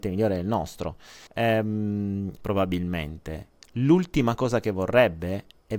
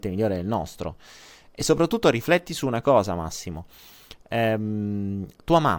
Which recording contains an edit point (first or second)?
first